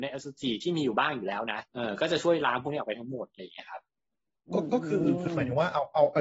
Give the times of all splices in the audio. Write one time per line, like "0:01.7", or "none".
0:01.7